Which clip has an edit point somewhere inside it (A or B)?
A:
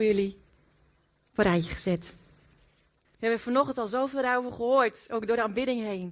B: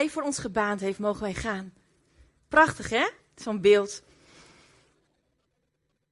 A